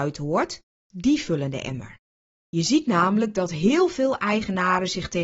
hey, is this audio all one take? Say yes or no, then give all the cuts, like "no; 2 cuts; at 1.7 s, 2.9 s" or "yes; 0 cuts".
no; 1 cut; at 2.3 s